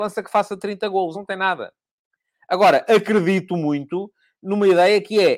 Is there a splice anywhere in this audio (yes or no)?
no